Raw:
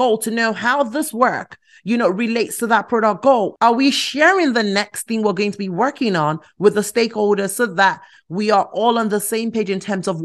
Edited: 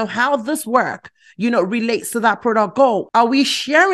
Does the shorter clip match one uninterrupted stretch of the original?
yes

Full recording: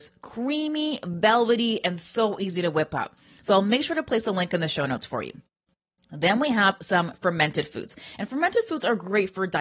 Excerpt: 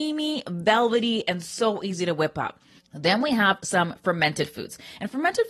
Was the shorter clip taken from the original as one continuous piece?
no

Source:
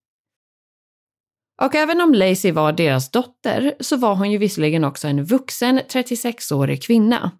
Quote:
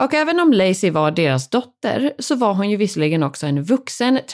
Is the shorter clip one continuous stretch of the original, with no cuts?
yes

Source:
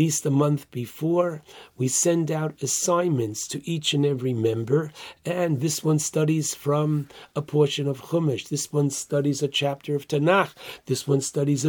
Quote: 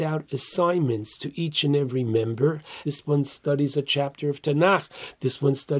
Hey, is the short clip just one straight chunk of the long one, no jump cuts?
no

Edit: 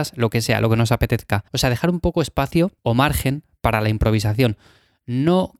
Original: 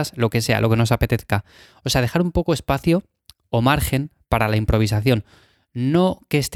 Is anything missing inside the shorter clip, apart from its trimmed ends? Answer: yes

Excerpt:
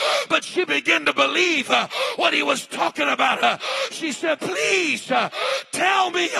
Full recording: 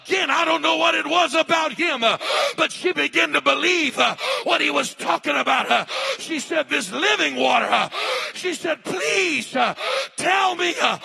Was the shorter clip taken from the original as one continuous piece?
no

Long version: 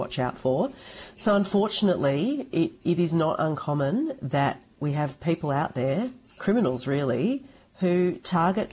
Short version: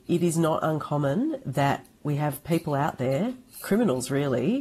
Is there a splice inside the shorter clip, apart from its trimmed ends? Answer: no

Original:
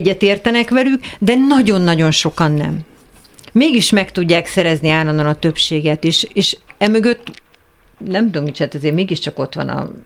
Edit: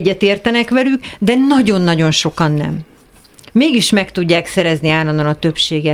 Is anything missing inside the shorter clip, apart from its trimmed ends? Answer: no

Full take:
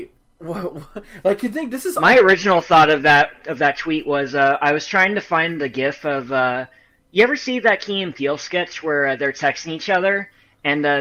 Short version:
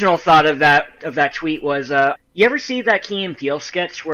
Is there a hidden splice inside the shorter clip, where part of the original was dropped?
yes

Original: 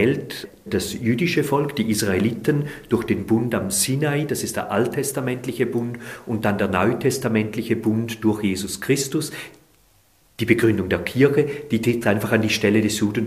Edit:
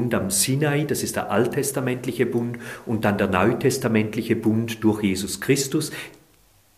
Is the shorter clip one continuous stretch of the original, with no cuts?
yes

